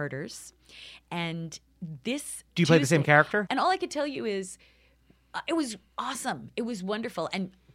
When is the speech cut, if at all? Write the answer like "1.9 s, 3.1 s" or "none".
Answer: 3.5 s